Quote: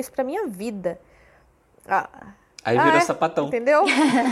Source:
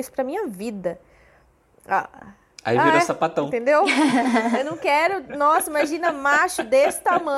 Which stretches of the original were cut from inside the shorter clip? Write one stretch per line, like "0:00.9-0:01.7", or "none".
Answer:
none

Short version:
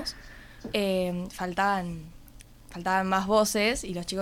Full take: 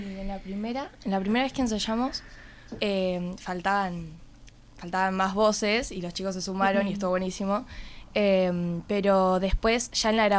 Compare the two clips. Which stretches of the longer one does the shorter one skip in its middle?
none

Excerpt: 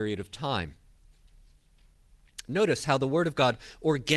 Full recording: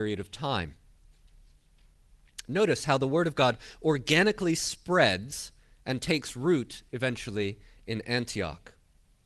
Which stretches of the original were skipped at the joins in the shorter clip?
none

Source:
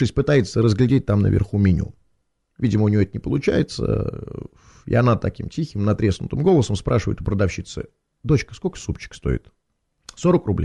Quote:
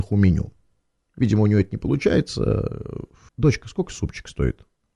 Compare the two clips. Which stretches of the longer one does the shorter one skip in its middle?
0:04.7-0:08.1

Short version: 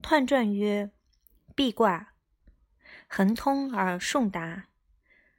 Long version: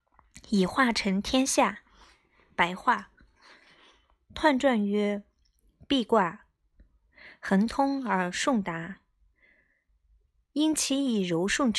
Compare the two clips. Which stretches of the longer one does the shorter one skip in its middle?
none

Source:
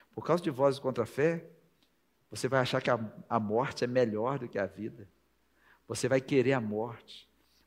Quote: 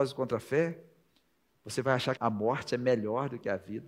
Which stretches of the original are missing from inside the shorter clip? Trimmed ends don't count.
0:02.8-0:03.3

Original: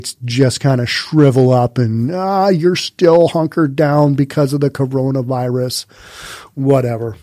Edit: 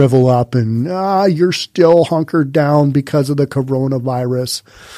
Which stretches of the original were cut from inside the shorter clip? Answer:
none

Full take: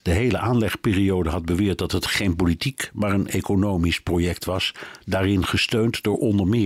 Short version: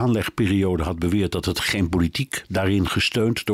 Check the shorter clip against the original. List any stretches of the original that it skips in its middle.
0:02.9-0:05.0

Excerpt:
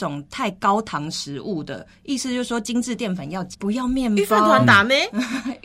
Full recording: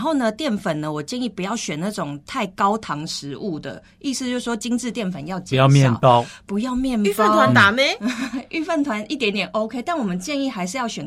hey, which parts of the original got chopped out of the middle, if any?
0:05.5-0:06.4

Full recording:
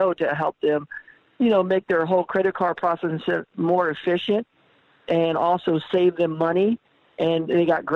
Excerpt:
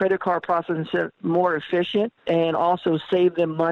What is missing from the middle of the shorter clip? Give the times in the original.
0:04.5-0:05.0

